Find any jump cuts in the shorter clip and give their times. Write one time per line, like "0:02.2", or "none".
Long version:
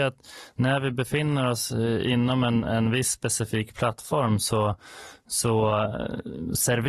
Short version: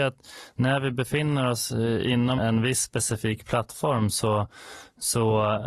0:02.4